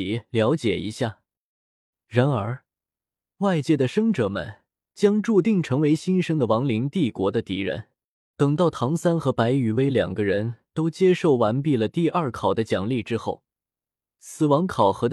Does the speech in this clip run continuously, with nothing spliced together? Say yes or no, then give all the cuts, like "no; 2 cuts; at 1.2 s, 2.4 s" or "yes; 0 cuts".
no; 2 cuts; at 1.9 s, 8.3 s